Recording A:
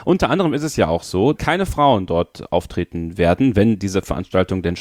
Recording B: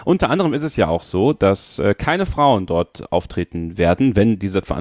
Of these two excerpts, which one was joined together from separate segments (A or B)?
A